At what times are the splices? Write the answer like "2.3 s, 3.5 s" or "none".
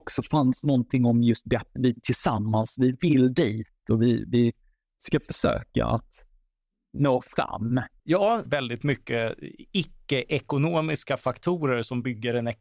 1.8 s, 8.5 s